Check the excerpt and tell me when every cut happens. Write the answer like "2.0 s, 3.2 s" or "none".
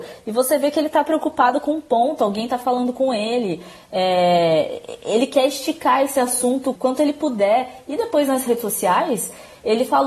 6.8 s